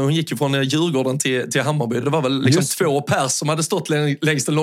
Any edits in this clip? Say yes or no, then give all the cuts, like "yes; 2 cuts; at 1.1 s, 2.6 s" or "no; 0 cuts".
no; 0 cuts